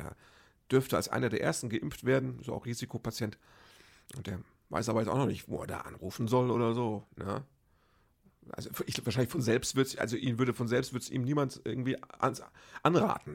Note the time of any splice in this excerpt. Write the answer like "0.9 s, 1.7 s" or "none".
none